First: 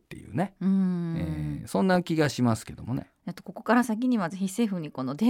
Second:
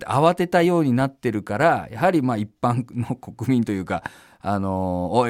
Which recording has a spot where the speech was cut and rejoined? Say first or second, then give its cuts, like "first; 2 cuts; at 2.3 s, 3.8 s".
first; 1 cut; at 3.2 s